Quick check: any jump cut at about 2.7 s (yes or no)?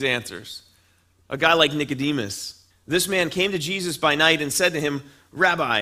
yes